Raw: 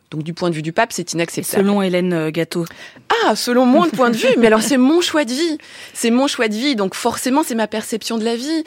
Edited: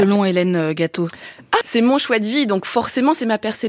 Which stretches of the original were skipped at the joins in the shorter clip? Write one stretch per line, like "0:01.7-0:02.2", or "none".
0:03.2-0:05.9

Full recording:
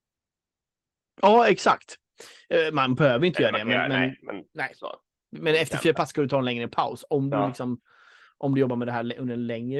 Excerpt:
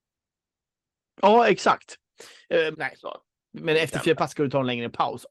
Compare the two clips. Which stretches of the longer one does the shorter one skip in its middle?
0:02.7-0:04.5

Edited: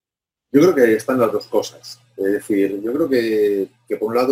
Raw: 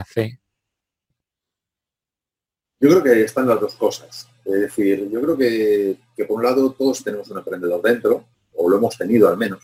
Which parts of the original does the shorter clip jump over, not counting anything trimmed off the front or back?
none

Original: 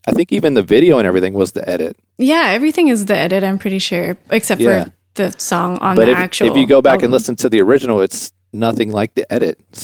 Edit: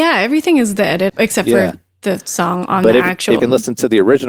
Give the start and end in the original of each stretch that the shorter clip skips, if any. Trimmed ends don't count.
0:03.4-0:04.2
0:06.5-0:07.0

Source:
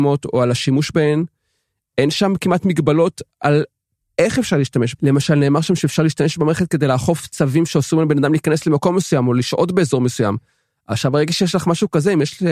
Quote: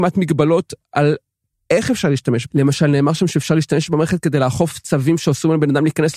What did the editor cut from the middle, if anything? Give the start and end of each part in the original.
none

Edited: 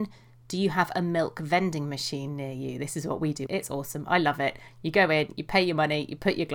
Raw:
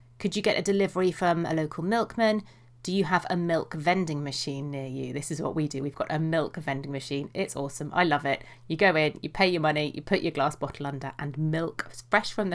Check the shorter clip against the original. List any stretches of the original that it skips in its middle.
0:05.8-0:07.3

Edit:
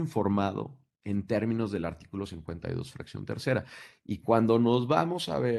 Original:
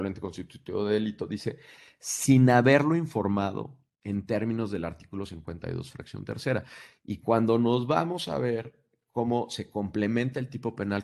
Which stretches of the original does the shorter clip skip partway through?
none

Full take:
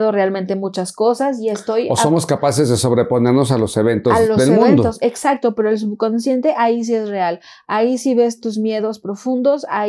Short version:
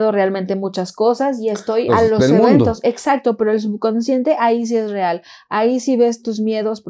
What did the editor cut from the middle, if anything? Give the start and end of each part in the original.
0:01.9-0:04.1

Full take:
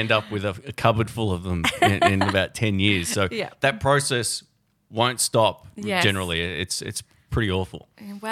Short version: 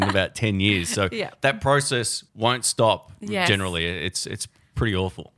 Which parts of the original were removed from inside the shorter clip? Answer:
0:04.5-0:04.8

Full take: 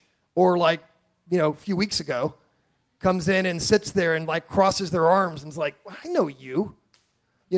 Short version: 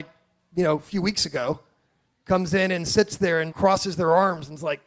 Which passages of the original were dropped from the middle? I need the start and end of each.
0:04.3-0:04.5

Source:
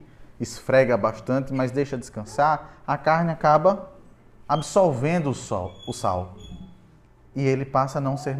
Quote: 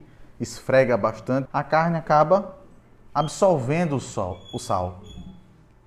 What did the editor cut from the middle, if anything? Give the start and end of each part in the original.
0:01.5-0:02.8

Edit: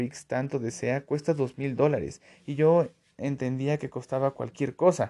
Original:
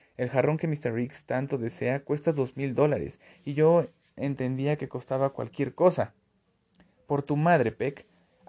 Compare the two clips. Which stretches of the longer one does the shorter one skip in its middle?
none

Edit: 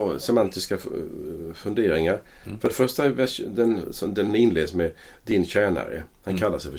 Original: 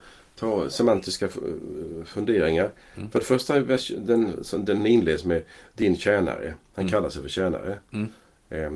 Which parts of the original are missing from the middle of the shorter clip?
none

